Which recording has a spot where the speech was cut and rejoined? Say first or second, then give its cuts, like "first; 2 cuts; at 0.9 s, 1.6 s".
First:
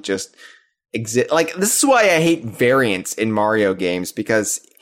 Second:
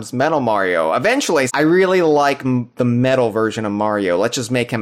second; 1 cut; at 1.5 s